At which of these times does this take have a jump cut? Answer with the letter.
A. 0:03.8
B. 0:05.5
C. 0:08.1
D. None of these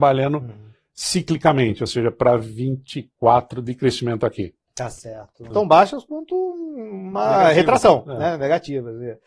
B